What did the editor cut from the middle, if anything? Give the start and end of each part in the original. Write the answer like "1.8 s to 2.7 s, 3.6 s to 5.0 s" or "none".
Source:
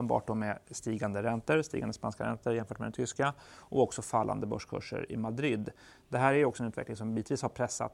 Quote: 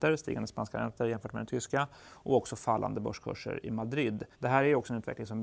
5.8 s to 6.0 s